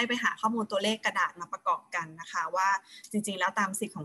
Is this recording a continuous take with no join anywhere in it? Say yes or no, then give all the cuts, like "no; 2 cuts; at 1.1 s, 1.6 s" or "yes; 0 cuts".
yes; 0 cuts